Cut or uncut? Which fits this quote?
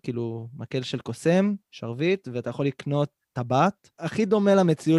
cut